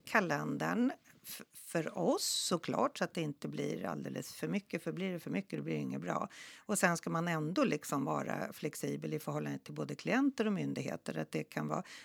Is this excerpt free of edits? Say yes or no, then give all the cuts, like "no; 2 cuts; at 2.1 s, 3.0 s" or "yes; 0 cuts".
yes; 0 cuts